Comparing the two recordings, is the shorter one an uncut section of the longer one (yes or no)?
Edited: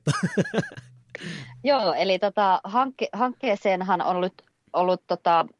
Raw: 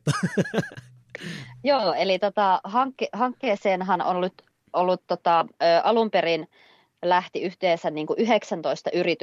yes